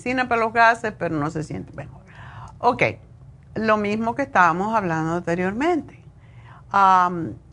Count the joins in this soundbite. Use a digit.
0